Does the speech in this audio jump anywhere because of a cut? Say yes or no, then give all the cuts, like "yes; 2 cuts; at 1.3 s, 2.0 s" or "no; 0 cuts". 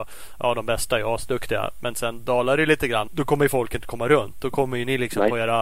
yes; 1 cut; at 3.1 s